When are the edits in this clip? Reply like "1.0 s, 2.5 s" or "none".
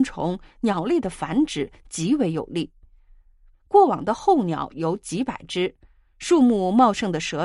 3.5 s